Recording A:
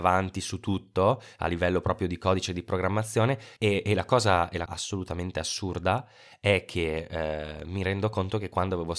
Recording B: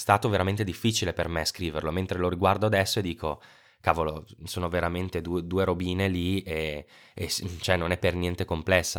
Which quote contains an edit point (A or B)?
A